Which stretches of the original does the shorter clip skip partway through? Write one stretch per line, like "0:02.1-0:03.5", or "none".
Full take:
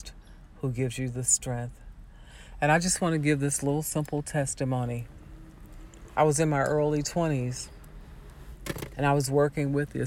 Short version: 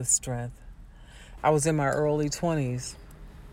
0:02.6-0:06.1